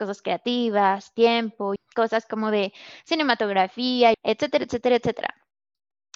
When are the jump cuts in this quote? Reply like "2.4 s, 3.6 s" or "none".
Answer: 1.8 s, 4.1 s